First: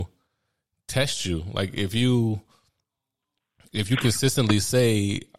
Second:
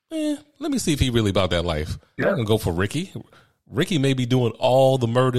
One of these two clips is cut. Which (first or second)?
second